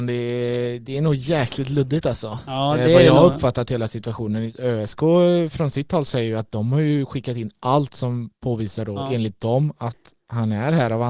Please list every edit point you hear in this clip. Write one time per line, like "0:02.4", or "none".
none